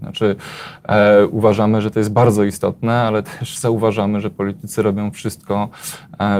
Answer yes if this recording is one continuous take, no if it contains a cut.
yes